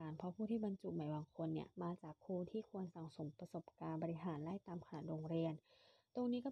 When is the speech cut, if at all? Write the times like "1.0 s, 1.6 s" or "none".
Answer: 1.7 s